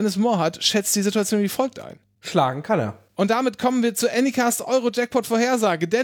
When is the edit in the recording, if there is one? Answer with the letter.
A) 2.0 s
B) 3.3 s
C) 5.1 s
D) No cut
D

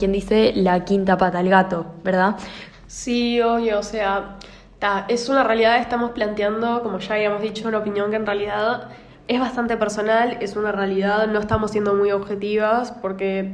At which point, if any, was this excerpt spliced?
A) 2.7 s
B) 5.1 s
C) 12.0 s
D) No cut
A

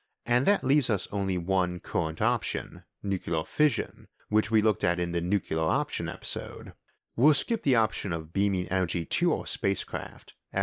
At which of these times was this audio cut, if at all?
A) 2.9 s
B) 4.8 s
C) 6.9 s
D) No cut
C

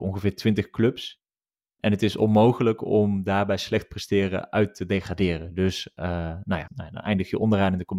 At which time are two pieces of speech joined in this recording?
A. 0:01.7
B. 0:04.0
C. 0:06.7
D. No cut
C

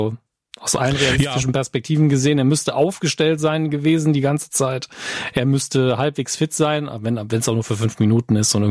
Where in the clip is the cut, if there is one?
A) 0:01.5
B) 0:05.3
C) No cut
C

